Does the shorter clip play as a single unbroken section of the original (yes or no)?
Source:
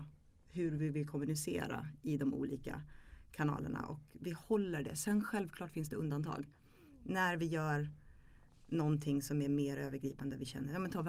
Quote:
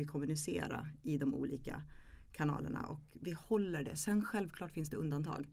yes